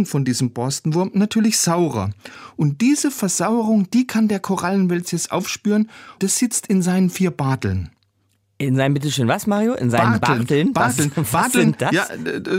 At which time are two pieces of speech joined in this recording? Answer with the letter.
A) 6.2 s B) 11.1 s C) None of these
A